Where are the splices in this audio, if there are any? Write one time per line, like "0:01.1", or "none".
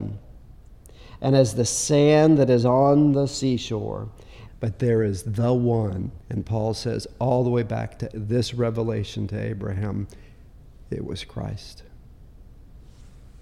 0:04.5
0:06.2